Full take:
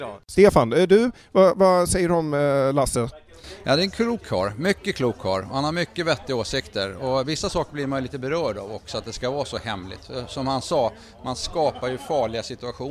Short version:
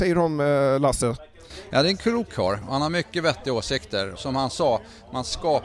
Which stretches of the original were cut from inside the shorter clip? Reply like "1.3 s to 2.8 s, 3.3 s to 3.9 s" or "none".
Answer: 4.5 s to 5.4 s, 7.0 s to 10.3 s

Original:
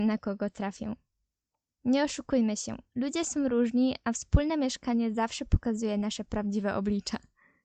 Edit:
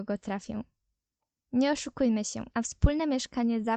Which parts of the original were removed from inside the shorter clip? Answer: 2.8 s to 4.0 s

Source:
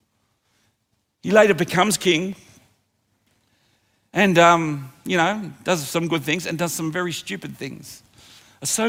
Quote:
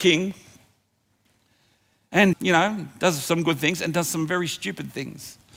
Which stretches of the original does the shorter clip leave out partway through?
4.3 s to 5.0 s

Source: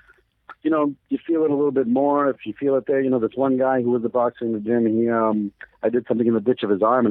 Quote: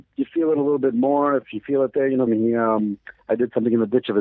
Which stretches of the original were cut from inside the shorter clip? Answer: 3.2 s to 4.8 s

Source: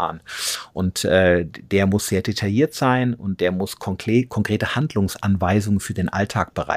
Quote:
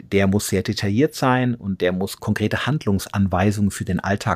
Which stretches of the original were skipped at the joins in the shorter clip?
3.8 s to 4.3 s

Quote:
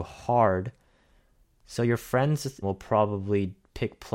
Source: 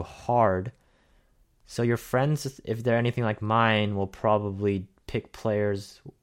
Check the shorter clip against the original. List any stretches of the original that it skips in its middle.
2.6 s to 3.9 s

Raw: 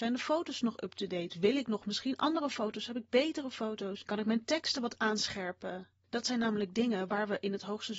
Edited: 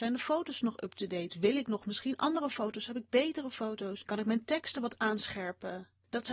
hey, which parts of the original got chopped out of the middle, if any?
none

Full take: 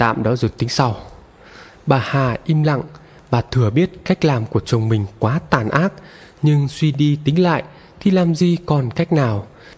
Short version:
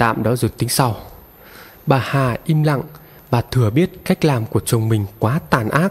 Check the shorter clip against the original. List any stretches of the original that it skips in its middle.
none

